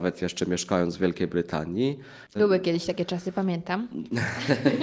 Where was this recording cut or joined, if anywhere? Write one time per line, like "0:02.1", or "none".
0:02.4